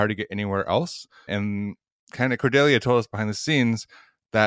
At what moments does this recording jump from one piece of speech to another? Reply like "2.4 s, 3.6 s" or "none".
1.3 s